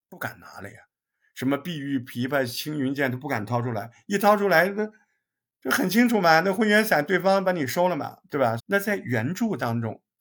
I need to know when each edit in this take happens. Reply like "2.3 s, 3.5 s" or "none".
8.6 s